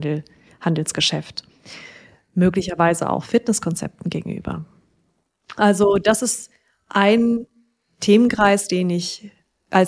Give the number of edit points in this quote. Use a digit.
0